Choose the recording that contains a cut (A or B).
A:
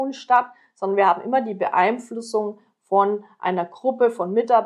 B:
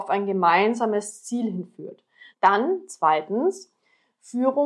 B